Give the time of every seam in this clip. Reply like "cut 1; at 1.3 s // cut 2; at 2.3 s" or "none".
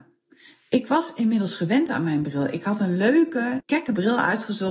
cut 1; at 3.6 s